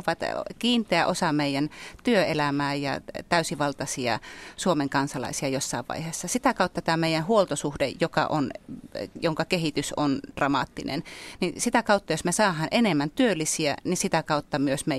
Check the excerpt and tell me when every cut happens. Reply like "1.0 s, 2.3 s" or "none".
none